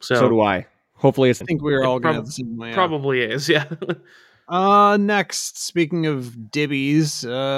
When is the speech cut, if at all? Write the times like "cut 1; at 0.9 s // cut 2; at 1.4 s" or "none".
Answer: cut 1; at 1.4 s